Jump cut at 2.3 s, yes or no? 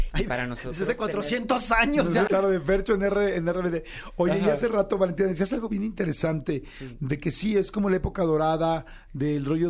yes